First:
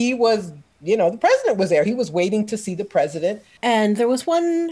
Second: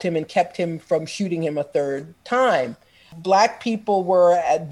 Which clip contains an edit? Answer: first; 1 cut; at 3.6 s

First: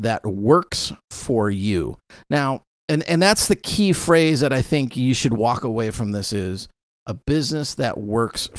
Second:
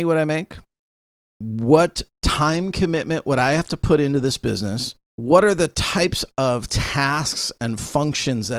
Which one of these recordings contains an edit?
second; 1 cut; at 5.0 s

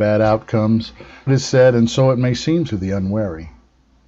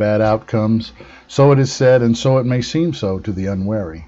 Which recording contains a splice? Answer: first; 2 cuts; at 1.3 s, 2.7 s

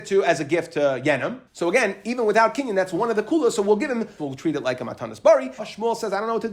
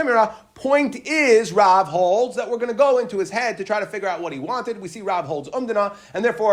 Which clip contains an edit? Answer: first; 3 cuts; at 1.5 s, 4.2 s, 5.6 s

